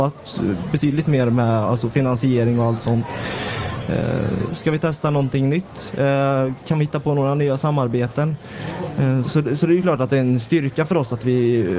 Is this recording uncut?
no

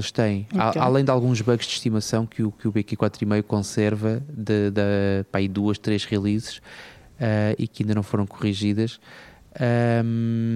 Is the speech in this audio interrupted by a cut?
no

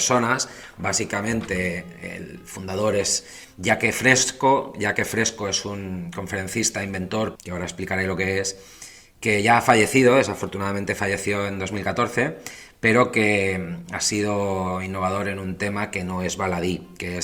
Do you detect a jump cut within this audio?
yes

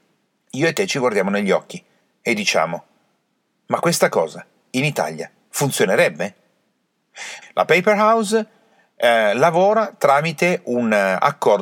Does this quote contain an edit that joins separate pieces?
yes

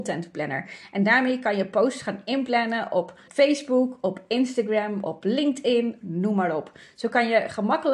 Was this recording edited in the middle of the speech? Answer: yes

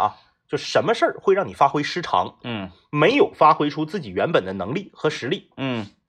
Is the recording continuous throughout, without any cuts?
yes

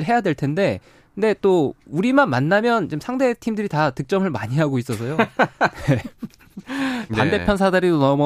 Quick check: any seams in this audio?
yes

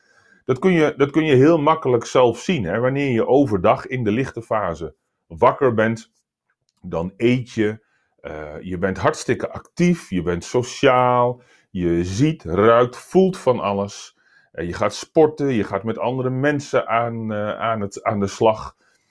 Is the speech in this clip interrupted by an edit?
no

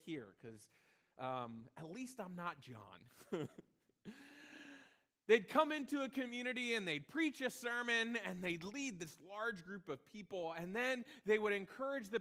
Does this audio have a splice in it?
no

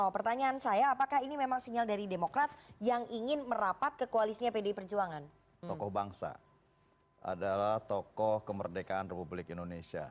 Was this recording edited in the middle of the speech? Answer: yes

